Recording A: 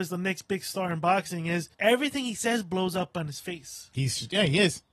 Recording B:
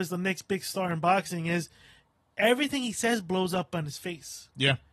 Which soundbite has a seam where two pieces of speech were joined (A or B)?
A